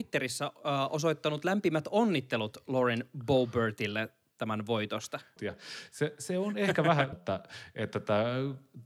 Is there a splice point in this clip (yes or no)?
yes